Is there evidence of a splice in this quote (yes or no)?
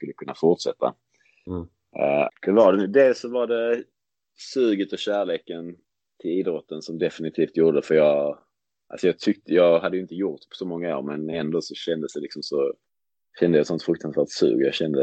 yes